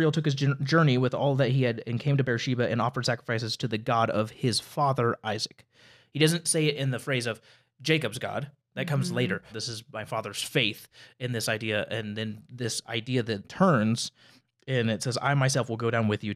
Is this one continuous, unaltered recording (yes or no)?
no